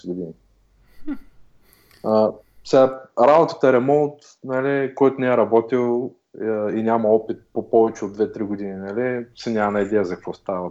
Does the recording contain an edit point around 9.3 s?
yes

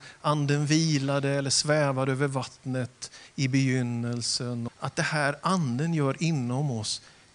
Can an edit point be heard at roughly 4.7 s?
yes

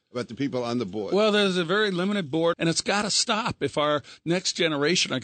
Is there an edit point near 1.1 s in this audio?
no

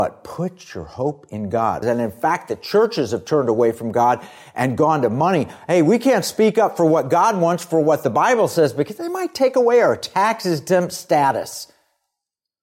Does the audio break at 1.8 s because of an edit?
yes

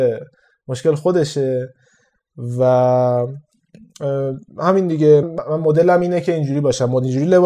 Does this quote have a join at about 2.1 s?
no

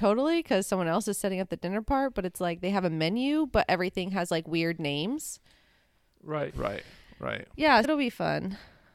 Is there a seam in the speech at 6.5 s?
yes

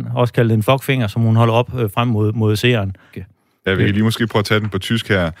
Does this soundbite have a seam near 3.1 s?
yes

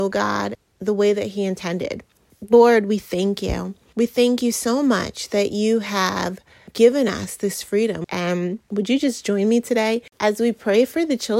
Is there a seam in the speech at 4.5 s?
no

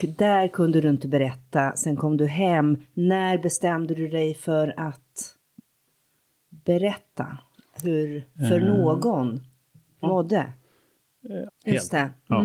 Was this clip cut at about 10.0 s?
yes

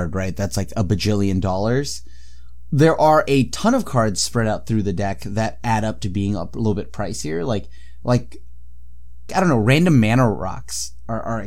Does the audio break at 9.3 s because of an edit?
yes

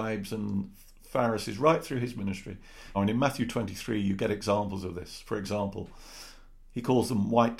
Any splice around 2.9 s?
yes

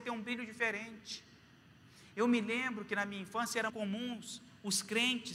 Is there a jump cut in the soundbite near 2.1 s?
no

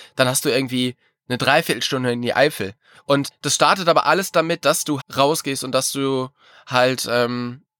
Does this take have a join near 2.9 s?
yes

